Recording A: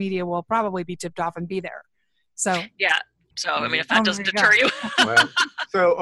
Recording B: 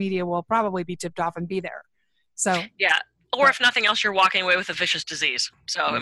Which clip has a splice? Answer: A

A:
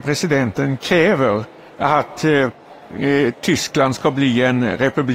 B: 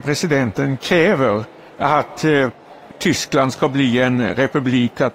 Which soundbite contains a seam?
B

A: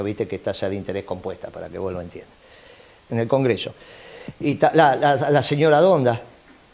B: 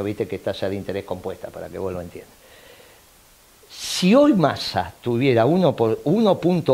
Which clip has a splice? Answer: A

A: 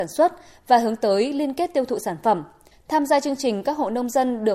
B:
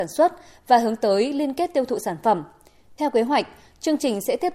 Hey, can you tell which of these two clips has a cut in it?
A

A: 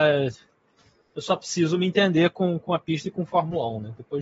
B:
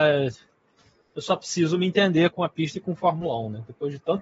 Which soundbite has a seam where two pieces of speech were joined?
B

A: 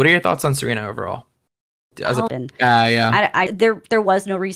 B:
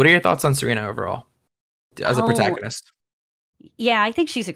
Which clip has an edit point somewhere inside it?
A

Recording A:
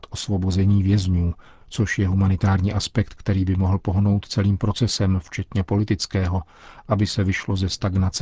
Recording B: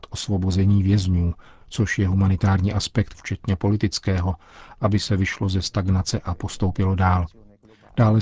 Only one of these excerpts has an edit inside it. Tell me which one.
B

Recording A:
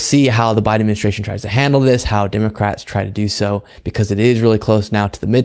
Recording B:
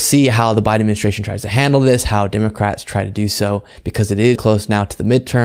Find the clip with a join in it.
B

